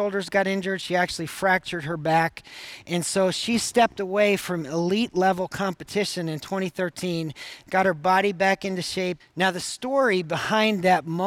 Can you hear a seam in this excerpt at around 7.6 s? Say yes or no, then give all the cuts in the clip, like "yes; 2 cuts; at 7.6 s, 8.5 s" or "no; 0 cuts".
yes; 2 cuts; at 7.6 s, 9.2 s